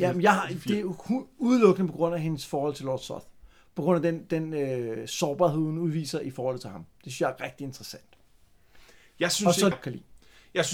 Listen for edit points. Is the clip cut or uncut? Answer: cut